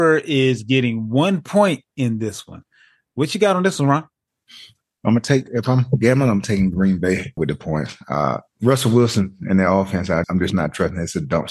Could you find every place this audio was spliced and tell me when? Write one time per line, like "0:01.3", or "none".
0:07.4
0:08.5
0:10.2

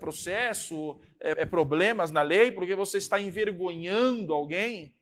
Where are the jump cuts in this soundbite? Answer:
0:01.3

